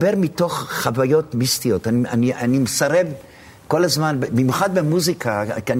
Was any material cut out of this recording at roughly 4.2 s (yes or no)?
no